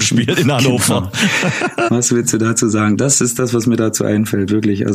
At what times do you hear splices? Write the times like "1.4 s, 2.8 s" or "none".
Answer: 1.9 s